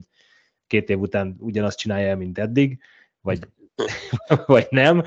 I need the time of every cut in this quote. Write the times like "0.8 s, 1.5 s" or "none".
none